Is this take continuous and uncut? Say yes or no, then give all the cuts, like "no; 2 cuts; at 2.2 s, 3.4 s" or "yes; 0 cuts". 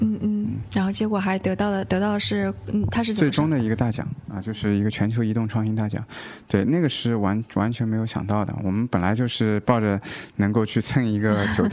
yes; 0 cuts